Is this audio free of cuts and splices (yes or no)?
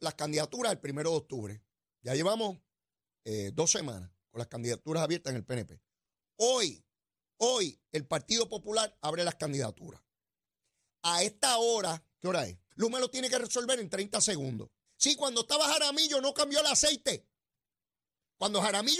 no